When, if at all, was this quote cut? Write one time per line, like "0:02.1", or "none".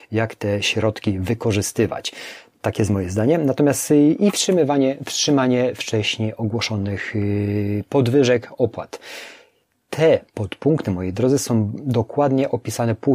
none